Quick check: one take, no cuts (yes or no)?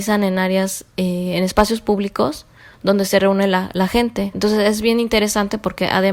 no